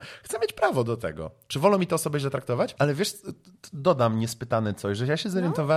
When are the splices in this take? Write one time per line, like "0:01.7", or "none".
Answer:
0:02.8